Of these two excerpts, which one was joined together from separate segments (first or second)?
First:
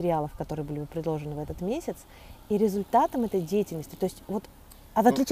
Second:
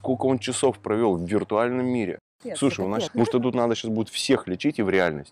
second